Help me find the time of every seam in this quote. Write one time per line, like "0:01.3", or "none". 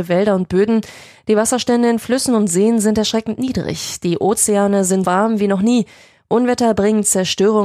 0:05.0

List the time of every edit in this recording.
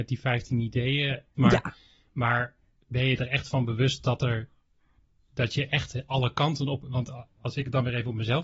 0:01.4

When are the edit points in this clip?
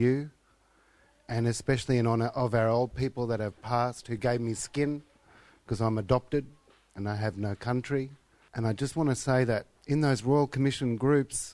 0:08.5
0:09.8

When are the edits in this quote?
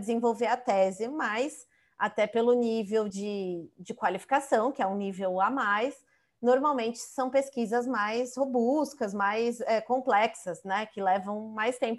none

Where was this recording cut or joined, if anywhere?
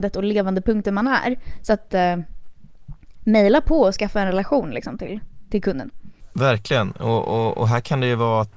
none

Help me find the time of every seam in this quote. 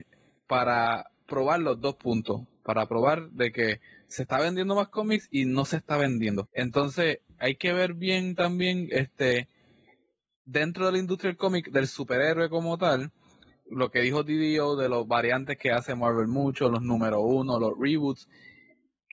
0:06.4

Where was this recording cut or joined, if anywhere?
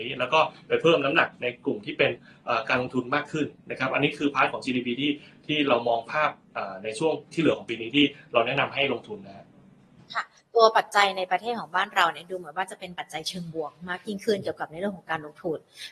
none

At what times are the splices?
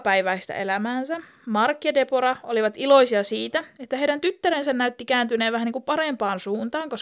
none

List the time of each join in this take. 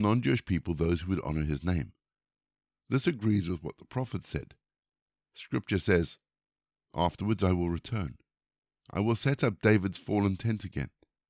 none

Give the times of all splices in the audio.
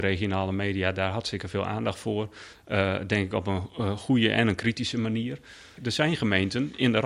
0:05.8

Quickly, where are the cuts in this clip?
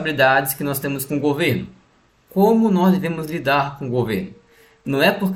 none

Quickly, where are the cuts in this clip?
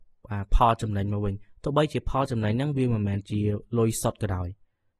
none

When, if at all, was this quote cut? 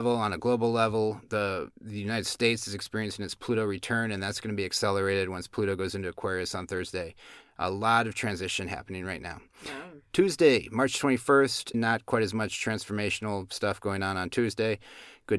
0:01.7
0:11.7

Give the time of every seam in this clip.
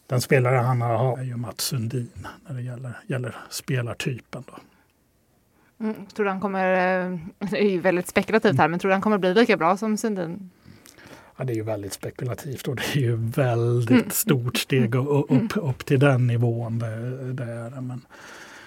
0:01.1

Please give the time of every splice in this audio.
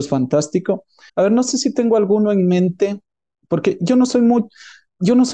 0:01.1

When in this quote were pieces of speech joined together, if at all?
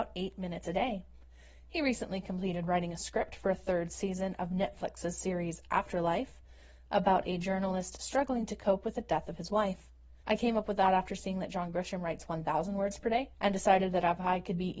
0:10.2
0:13.3

